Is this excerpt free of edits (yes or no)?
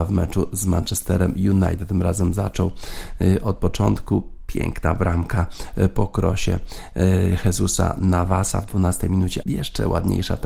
no